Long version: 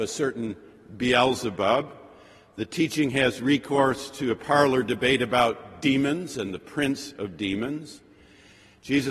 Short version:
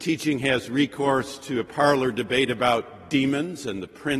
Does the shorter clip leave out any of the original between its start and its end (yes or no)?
no